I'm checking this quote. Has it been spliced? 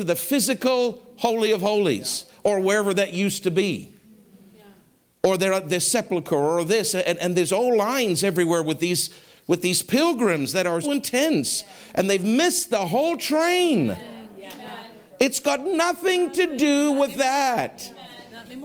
yes; 1 cut; at 10.8 s

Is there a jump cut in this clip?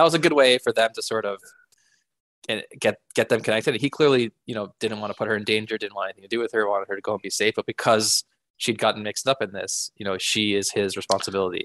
no; 0 cuts

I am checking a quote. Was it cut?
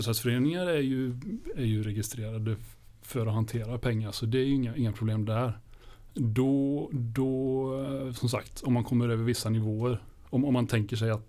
yes; 1 cut; at 6.1 s

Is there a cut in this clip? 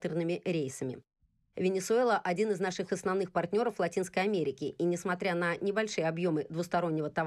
no; 0 cuts

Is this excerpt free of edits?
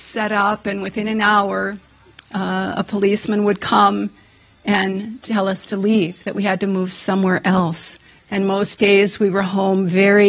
no; 1 cut; at 8.2 s

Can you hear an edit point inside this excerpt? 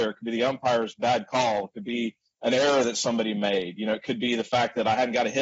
no; 0 cuts

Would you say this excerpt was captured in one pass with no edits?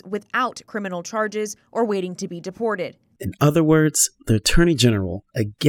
no; 1 cut; at 3.2 s

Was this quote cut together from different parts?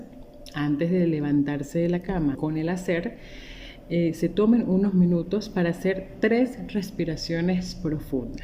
yes; 1 cut; at 2.3 s

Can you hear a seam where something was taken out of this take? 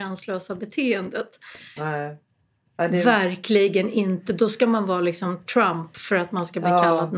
yes; 1 cut; at 1.8 s

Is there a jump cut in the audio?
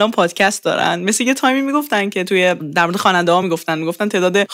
no; 0 cuts

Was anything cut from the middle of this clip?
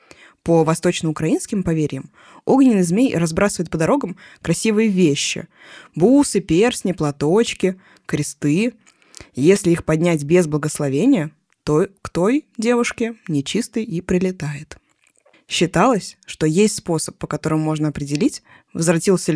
yes; 1 cut; at 15.3 s

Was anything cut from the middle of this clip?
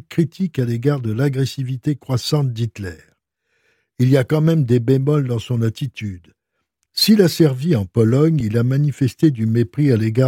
no; 0 cuts

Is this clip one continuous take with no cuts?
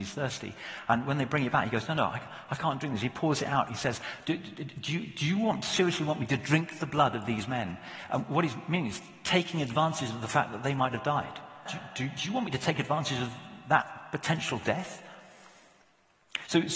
no; 1 cut; at 11.7 s

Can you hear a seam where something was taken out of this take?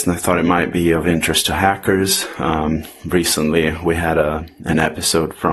no; 0 cuts

